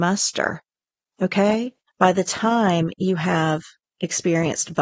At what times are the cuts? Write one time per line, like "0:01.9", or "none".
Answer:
0:01.9

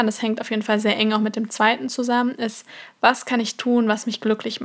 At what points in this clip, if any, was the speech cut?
none

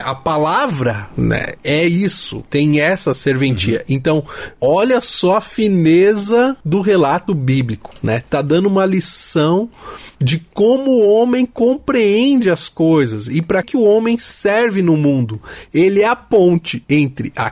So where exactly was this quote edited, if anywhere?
0:13.6

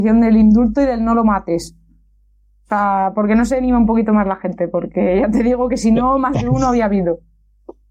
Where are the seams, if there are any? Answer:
none

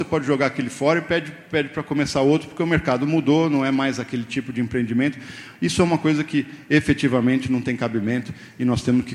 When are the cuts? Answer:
none

